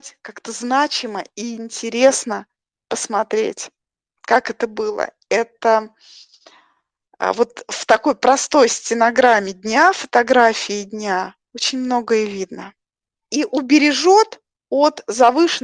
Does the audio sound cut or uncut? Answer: cut